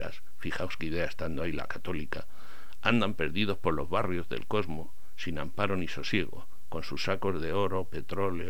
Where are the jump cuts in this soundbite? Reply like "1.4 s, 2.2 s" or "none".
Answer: none